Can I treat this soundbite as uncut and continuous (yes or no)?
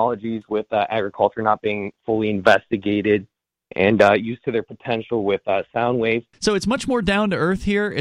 no